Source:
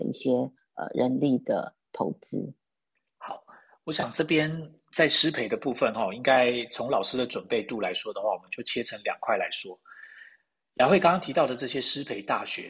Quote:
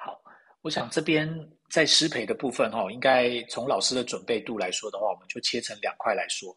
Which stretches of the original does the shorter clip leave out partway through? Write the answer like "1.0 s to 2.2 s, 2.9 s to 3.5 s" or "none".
none